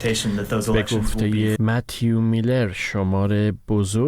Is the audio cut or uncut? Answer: cut